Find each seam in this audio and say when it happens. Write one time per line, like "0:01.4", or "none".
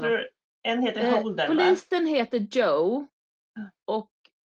none